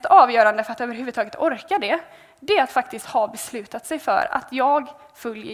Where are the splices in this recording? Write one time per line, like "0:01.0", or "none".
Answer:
none